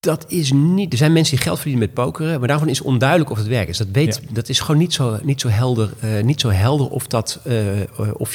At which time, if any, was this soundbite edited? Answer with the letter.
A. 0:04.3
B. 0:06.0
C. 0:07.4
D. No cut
D